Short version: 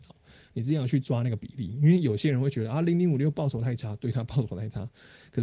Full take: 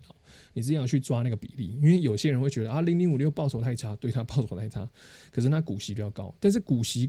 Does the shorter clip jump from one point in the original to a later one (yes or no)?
no